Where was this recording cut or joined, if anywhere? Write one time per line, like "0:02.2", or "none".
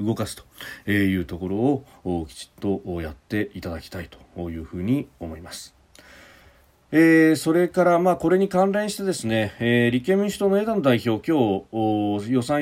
none